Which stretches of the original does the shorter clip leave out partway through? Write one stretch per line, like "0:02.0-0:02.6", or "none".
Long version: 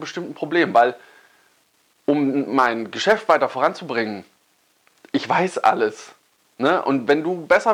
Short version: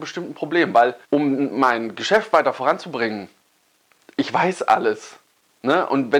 0:01.0-0:02.0